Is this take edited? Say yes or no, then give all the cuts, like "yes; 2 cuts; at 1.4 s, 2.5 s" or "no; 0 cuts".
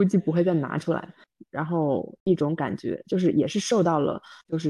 yes; 1 cut; at 1.4 s